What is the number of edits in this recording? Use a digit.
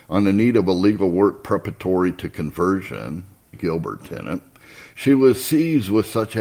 1